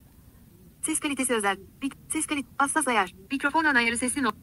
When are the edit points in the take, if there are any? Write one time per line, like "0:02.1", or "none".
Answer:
0:01.7
0:03.3